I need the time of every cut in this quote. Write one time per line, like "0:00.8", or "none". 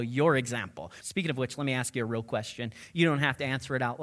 0:01.0